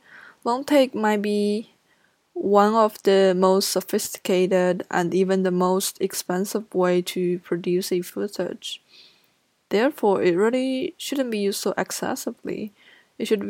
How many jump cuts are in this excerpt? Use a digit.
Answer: 0